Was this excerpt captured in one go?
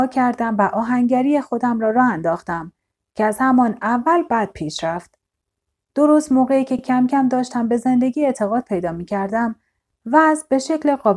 yes; 0 cuts

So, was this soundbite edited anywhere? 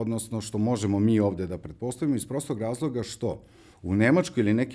yes; 1 cut; at 3.7 s

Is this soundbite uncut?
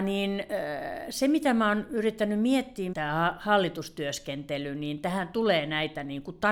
no; 1 cut; at 2.9 s

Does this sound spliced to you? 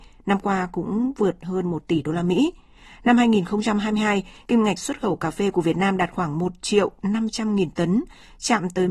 no; 0 cuts

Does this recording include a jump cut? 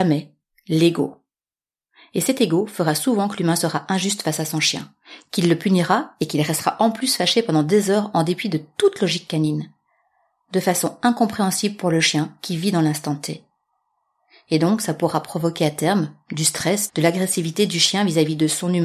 yes; 1 cut; at 16.9 s

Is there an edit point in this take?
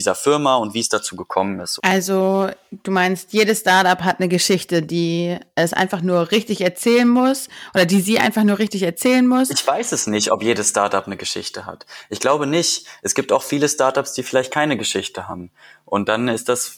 yes; 1 cut; at 1.8 s

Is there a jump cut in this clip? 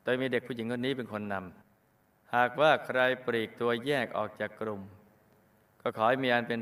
yes; 1 cut; at 1.6 s

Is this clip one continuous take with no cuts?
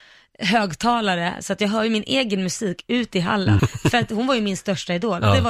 no; 1 cut; at 3.6 s

